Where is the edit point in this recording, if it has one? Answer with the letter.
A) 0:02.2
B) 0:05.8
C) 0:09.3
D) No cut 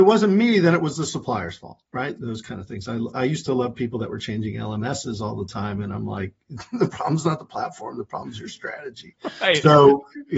A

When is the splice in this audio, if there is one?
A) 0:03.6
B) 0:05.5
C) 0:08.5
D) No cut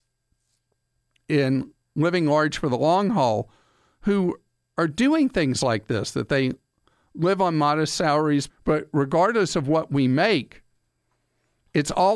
C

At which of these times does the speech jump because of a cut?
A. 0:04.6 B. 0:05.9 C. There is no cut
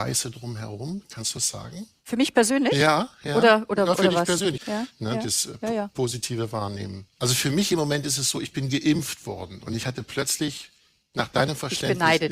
A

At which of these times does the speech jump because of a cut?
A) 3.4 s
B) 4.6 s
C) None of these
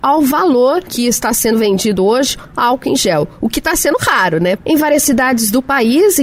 B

